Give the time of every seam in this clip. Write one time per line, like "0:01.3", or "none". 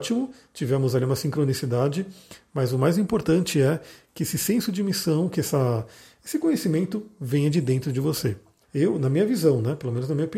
0:08.6